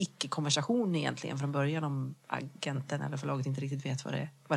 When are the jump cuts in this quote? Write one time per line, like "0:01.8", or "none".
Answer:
none

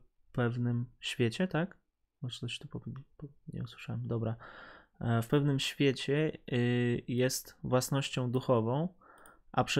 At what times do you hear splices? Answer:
none

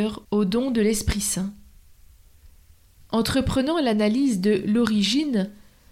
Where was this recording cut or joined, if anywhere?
0:03.0

